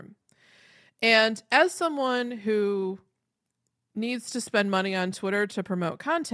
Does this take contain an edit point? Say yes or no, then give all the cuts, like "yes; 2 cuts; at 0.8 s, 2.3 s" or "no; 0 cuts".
no; 0 cuts